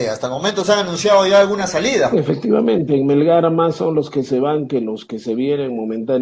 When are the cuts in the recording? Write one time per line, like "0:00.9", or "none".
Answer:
0:02.1

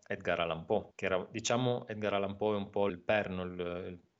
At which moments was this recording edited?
0:00.9
0:02.9

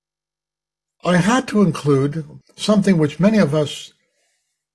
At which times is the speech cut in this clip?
0:02.4

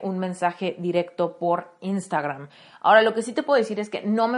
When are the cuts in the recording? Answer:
none

